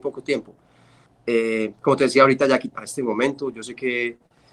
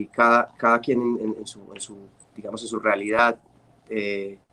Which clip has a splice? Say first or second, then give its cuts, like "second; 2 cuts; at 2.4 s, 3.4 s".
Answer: first; 2 cuts; at 1.1 s, 2.7 s